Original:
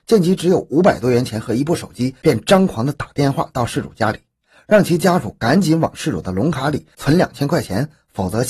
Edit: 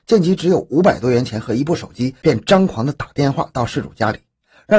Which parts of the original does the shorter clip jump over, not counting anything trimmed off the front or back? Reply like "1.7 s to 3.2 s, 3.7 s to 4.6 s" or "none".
none